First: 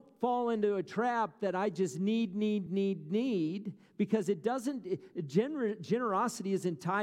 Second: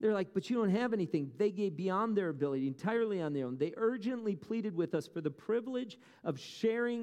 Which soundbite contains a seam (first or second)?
first